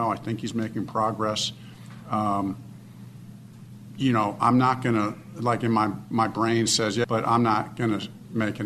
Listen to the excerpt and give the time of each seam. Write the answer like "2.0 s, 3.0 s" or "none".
7.0 s

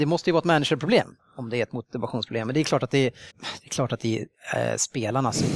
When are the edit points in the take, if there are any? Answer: 3.3 s

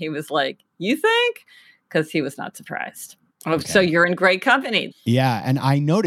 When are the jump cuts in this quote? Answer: 3.3 s, 4.9 s

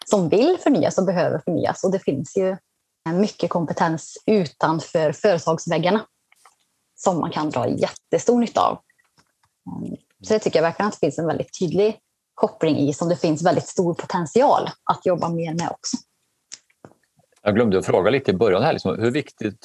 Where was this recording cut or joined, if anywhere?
3.1 s

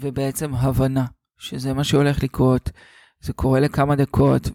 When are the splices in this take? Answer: none

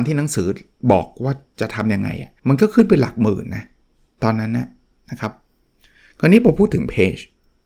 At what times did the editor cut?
2.4 s

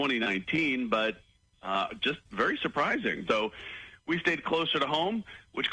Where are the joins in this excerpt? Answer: 3.3 s

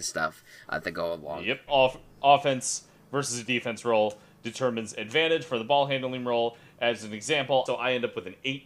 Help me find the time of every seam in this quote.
1.7 s, 7.7 s

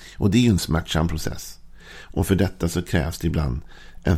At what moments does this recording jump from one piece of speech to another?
none

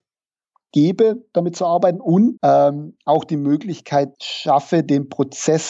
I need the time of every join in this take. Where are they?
2.4 s, 4.1 s

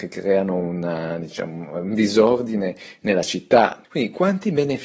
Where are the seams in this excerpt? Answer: 3.8 s

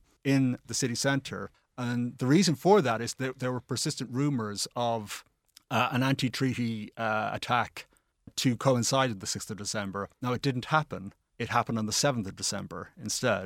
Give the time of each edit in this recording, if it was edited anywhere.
none

